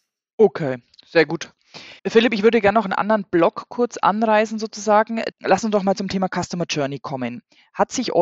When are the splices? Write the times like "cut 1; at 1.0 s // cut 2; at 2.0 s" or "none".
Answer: cut 1; at 2.0 s // cut 2; at 5.3 s